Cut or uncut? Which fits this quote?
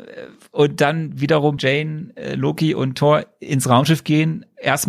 cut